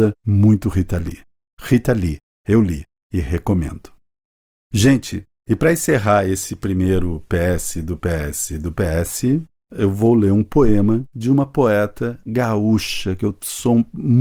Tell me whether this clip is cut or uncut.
uncut